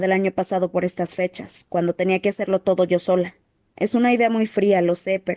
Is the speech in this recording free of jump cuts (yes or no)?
no